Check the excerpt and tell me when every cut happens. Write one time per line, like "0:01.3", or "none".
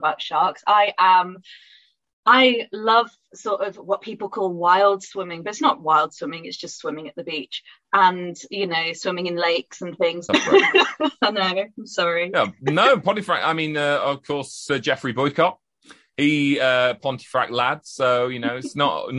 0:10.3